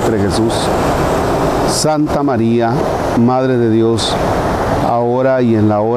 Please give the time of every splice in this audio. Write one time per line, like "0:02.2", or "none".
0:04.8